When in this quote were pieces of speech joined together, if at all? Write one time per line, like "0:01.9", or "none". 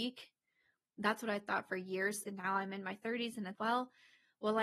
0:02.2
0:03.5